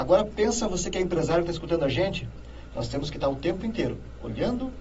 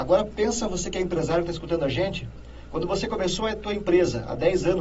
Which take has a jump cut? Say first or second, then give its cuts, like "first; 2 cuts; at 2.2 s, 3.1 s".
first; 1 cut; at 2.7 s